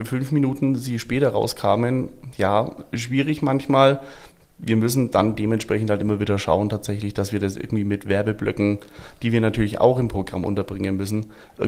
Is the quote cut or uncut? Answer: uncut